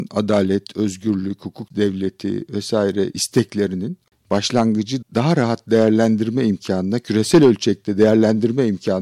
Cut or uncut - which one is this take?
cut